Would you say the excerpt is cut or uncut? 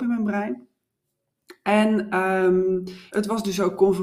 cut